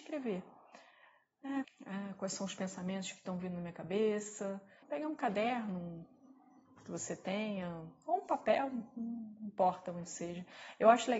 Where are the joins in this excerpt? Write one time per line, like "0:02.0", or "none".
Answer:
0:01.6
0:04.8